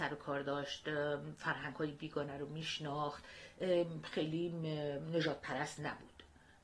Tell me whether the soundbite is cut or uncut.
uncut